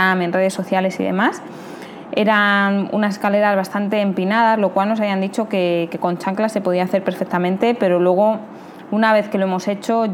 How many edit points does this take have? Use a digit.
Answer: 1